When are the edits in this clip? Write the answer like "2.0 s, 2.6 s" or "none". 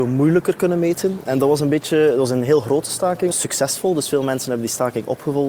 1.2 s, 3.3 s